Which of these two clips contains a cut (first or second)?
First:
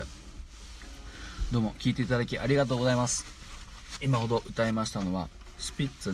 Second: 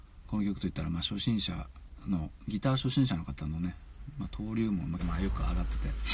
second